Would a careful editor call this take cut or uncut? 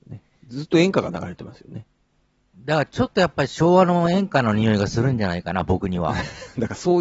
uncut